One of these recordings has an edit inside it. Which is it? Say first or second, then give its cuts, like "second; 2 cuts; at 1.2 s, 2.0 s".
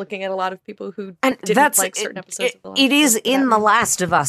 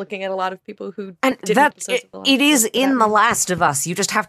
second; 1 cut; at 1.7 s